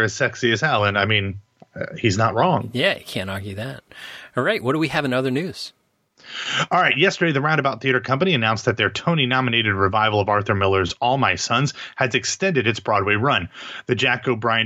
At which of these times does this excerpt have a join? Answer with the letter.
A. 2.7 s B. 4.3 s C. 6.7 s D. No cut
D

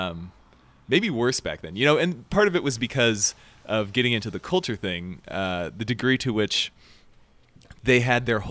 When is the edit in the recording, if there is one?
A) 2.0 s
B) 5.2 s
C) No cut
C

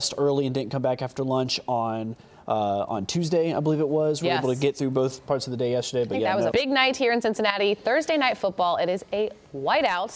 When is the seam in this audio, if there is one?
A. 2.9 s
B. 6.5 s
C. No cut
B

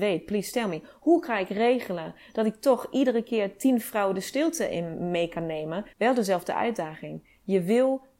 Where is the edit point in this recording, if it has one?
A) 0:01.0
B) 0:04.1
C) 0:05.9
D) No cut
C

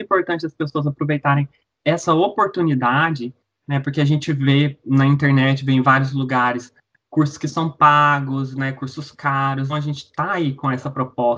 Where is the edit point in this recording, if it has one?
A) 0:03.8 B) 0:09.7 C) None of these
B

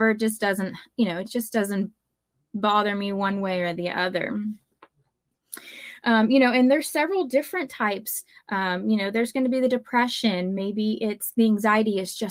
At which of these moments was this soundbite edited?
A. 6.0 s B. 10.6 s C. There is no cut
C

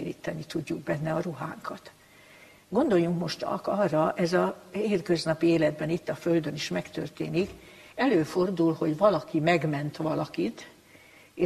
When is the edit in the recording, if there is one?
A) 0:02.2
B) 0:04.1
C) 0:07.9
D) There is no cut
D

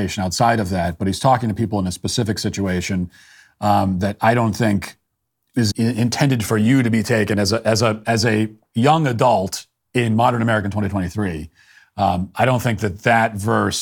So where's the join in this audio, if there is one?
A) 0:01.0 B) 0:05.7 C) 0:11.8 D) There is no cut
B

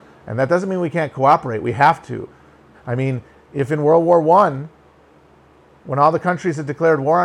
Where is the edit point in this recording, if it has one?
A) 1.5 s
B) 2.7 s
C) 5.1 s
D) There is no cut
B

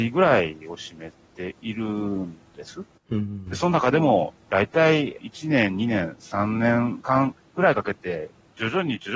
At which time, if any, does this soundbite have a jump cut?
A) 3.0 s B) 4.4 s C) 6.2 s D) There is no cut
D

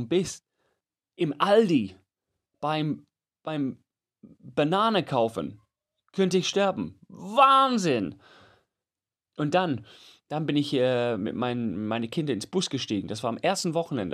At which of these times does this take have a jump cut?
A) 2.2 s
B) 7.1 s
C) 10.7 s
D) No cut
D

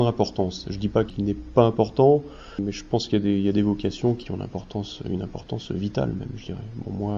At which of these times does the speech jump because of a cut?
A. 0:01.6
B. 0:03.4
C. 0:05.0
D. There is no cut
D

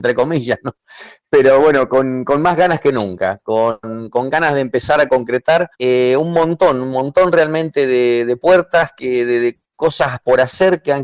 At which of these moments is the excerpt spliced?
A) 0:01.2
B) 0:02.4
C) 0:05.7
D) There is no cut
C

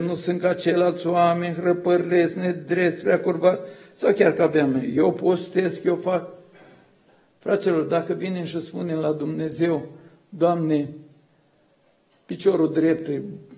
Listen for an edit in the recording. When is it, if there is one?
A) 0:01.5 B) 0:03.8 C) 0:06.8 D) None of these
D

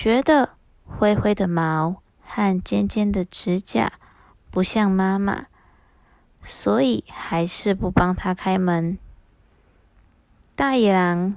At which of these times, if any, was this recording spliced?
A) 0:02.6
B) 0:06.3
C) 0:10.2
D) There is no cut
D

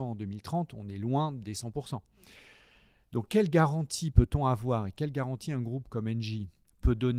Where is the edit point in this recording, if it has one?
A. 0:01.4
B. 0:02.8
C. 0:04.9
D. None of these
D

